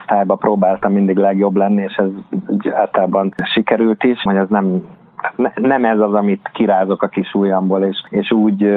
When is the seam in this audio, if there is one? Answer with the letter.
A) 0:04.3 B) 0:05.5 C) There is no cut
A